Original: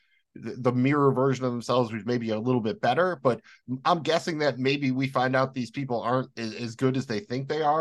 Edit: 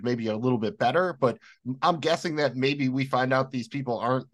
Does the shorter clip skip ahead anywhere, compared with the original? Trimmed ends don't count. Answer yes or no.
no